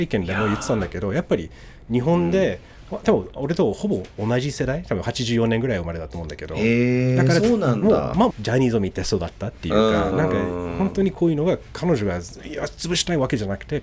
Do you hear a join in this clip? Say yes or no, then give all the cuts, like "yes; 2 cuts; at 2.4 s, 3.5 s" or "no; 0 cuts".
yes; 2 cuts; at 8.3 s, 10.1 s